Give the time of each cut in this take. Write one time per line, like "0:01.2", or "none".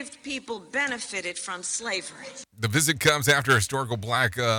none